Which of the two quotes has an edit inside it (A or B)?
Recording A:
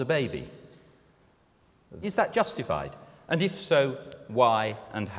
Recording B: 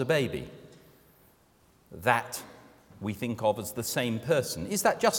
A